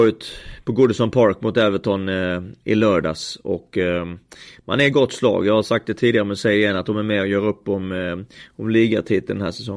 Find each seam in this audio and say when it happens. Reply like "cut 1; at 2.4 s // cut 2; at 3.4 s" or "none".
none